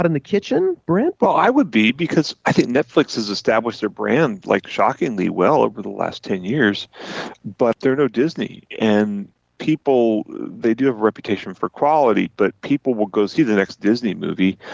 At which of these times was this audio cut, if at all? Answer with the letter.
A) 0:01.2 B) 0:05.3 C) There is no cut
A